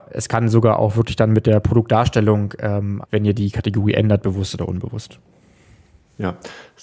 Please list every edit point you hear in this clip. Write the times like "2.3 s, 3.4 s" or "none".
3.0 s